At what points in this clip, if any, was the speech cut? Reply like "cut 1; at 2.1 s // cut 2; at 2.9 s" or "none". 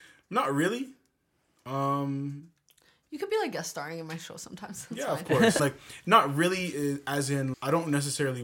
cut 1; at 5.6 s // cut 2; at 7.5 s